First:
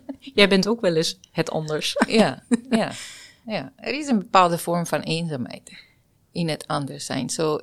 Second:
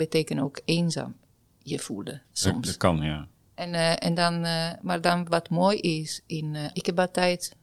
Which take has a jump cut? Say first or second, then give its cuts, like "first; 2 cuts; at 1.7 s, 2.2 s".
second; 1 cut; at 6.7 s